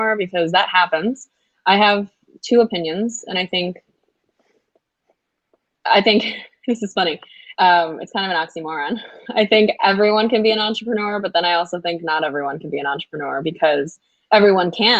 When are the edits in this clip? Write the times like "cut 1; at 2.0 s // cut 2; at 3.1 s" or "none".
cut 1; at 7.5 s